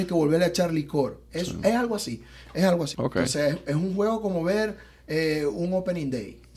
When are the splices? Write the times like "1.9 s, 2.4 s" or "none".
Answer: 1.3 s, 2.9 s